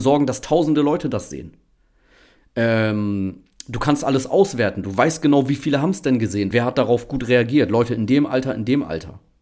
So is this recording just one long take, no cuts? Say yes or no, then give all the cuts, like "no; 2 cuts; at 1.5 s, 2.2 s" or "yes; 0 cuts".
no; 1 cut; at 6.5 s